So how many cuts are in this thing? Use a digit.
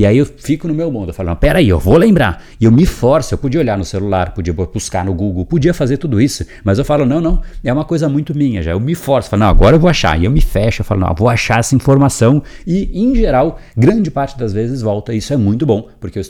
0